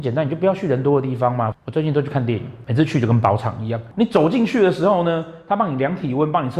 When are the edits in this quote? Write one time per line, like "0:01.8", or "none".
0:01.5